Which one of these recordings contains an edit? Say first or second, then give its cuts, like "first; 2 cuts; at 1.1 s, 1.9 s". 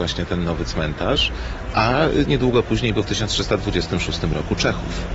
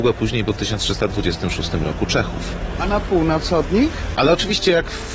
second; 1 cut; at 4.2 s